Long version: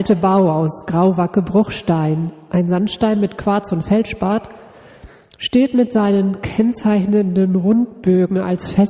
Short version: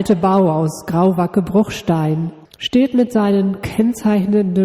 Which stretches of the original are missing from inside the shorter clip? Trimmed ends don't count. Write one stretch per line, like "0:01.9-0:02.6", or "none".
0:02.5-0:05.3